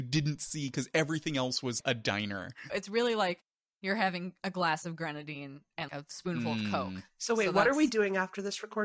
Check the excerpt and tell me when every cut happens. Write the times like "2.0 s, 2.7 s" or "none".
2.7 s